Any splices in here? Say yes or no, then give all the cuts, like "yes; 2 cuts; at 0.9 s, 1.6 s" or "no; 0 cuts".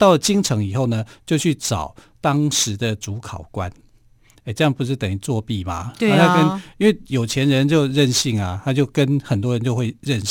no; 0 cuts